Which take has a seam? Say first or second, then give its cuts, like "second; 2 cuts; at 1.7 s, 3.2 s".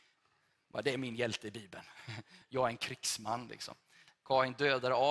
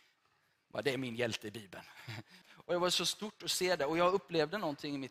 second; 1 cut; at 2.4 s